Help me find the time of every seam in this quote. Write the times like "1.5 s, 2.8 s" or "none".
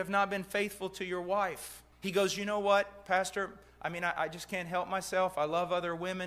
1.9 s